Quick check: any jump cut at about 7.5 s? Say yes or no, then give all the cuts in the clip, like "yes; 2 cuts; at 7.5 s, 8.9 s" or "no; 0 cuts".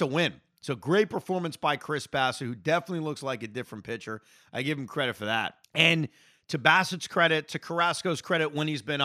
no; 1 cut; at 5.6 s